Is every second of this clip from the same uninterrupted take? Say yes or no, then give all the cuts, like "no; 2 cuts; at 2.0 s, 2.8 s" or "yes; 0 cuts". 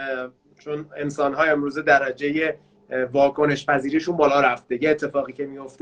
yes; 0 cuts